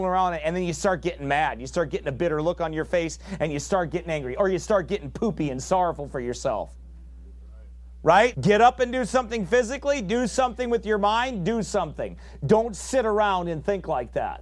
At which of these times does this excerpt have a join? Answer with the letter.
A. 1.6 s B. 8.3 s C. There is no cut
B